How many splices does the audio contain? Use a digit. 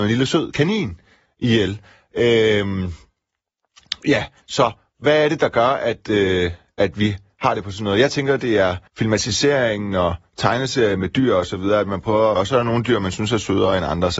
2